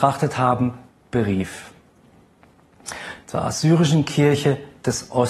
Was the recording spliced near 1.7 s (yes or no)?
no